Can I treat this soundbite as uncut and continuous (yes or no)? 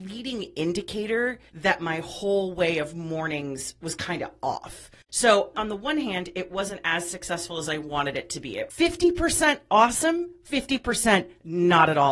no